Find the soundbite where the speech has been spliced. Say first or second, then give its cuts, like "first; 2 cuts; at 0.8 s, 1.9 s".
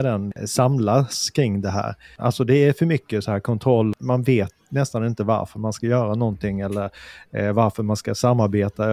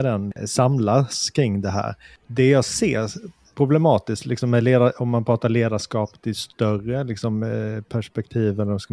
first; 1 cut; at 2.2 s